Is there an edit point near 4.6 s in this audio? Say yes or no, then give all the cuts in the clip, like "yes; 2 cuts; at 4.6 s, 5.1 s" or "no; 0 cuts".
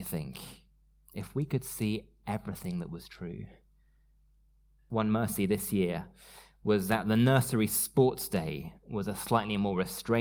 no; 0 cuts